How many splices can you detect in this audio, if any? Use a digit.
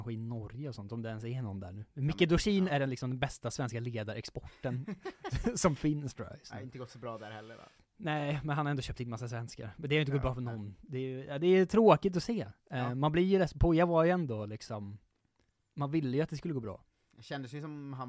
0